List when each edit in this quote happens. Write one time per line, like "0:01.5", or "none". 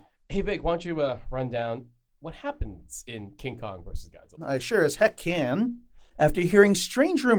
none